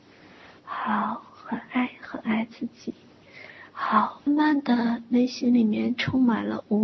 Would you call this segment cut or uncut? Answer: cut